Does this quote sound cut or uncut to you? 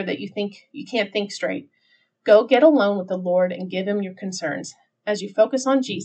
uncut